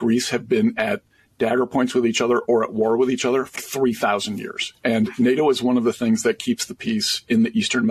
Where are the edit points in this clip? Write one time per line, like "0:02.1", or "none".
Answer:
0:03.6